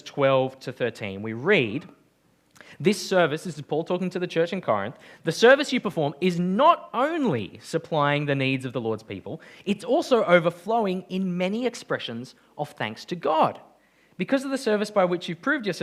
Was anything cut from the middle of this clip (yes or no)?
no